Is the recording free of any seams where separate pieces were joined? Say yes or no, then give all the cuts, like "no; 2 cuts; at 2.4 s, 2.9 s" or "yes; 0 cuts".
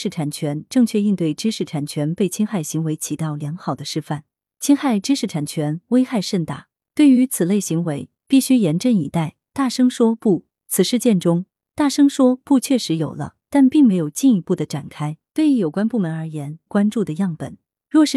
no; 2 cuts; at 15.3 s, 16.7 s